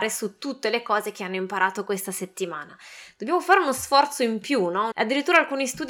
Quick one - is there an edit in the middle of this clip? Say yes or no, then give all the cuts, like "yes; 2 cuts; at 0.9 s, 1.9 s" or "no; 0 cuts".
yes; 1 cut; at 4.9 s